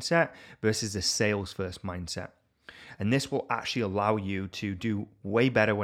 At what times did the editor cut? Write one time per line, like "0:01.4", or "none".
none